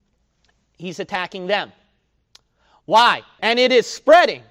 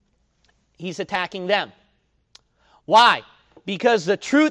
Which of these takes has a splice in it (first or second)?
first